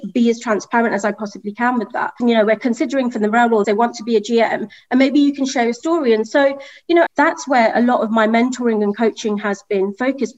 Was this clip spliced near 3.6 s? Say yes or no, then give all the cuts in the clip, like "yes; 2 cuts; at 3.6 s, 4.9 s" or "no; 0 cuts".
yes; 3 cuts; at 2.2 s, 3.6 s, 7.1 s